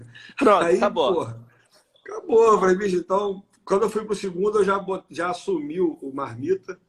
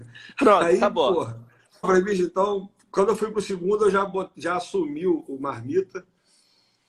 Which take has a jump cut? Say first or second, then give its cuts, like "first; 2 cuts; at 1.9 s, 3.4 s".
second; 1 cut; at 1.8 s